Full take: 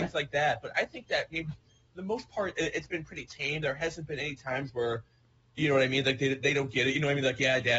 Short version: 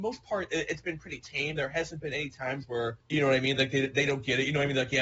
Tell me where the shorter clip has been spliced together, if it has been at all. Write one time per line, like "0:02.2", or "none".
0:03.0

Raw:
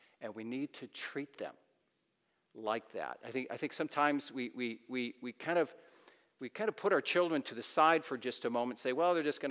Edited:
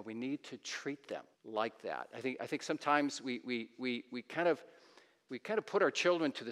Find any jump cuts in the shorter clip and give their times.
0:01.3

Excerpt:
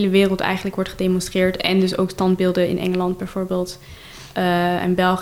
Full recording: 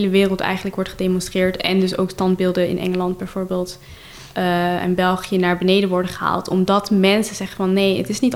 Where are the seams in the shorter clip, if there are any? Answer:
none

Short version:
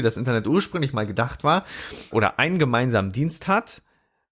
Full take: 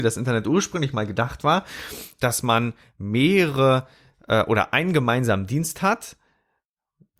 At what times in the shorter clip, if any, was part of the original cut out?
0:02.1

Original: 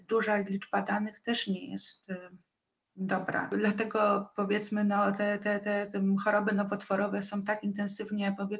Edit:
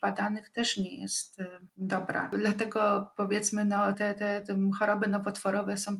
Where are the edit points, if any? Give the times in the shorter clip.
0:01.7
0:03.9

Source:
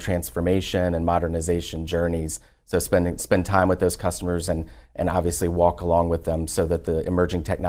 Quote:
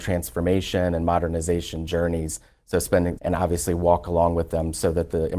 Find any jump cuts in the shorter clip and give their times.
0:03.2

